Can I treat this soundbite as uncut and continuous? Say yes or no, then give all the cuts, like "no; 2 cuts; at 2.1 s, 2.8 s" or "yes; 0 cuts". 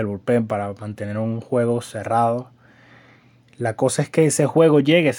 yes; 0 cuts